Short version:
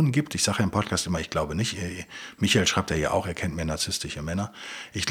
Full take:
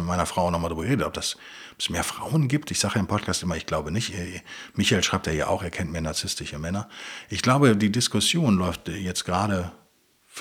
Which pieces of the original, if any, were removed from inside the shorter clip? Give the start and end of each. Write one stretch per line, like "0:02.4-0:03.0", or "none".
none